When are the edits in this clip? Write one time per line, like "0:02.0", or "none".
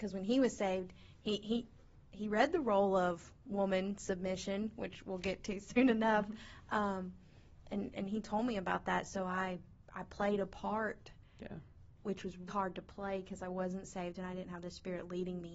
0:12.5